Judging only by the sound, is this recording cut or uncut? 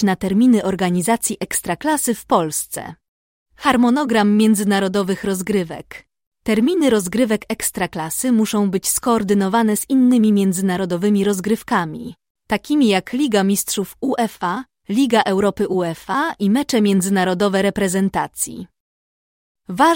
cut